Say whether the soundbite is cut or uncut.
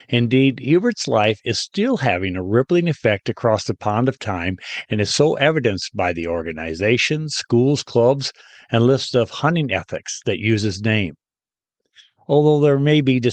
uncut